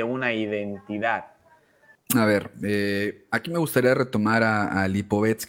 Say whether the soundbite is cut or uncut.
cut